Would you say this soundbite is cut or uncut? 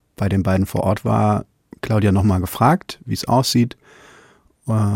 uncut